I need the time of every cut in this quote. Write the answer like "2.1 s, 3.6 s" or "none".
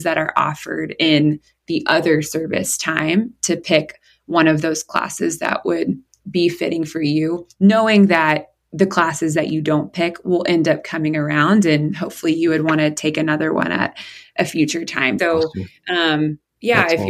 15.2 s